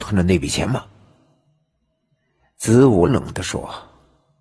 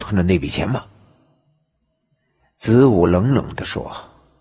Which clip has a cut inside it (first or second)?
first